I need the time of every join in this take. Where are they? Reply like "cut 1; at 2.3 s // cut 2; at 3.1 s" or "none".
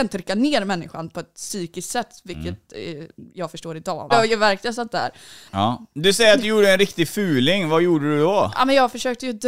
cut 1; at 4.1 s // cut 2; at 5.5 s